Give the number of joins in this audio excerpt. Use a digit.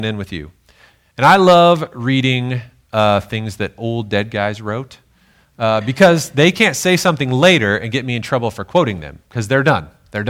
0